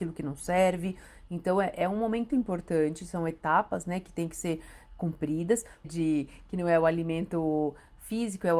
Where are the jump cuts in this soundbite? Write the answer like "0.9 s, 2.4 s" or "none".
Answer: 2.3 s, 5.8 s